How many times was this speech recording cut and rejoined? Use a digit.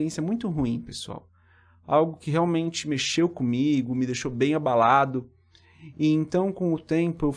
0